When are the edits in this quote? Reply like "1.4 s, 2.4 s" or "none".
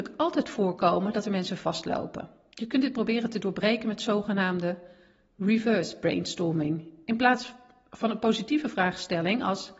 none